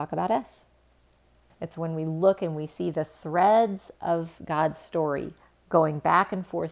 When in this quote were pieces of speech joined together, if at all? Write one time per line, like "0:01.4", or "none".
0:01.5